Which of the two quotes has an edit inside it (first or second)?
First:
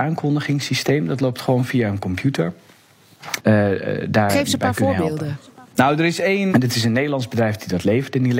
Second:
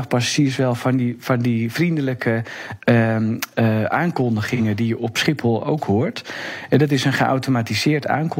first